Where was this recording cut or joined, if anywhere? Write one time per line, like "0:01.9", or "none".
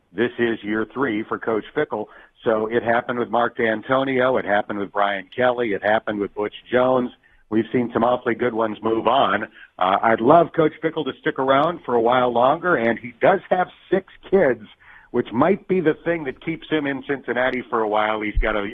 none